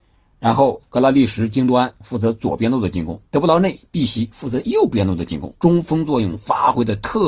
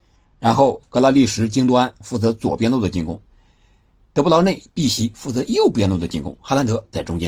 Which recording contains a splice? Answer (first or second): first